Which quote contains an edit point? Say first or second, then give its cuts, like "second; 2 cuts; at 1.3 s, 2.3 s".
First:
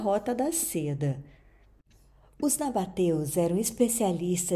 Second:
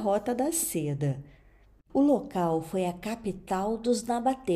second; 1 cut; at 1.9 s